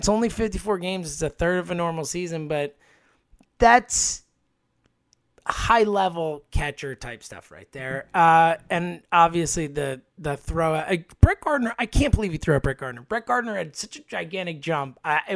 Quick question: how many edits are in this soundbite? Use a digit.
0